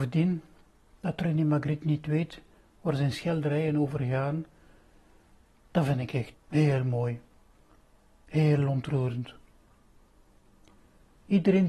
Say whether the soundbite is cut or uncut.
cut